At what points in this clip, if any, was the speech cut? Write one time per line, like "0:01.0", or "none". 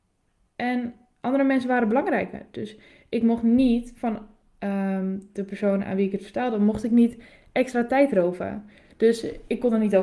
none